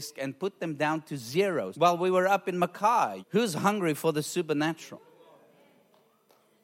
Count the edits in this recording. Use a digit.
2